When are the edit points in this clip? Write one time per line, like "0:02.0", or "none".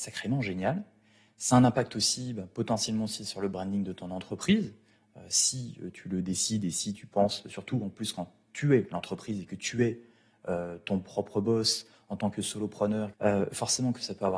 0:01.3
0:13.1

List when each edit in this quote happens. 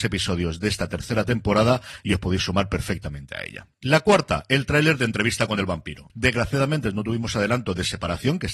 0:06.1

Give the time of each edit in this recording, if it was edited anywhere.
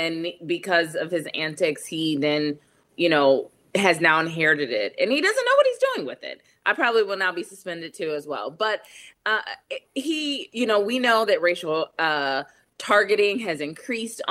none

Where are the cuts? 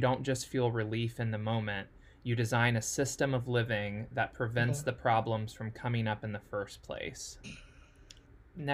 0:07.4

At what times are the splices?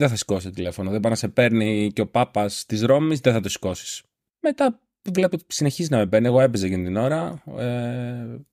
0:04.3

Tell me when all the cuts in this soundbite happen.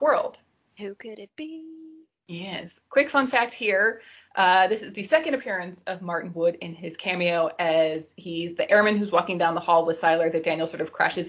0:02.8

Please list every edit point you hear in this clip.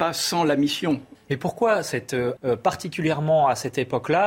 0:01.2
0:02.4

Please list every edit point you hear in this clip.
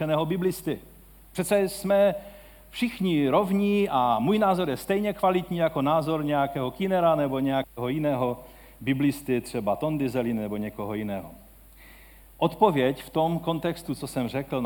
none

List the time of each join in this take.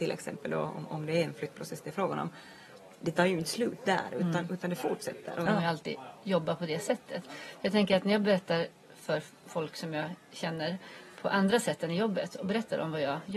0:05.5

